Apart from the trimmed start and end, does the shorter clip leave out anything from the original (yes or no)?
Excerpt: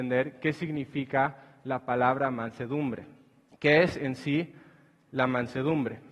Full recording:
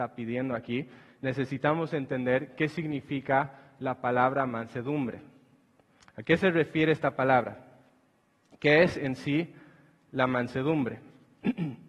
yes